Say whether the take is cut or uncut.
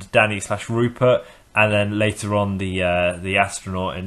uncut